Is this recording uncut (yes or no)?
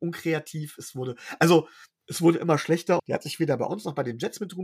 no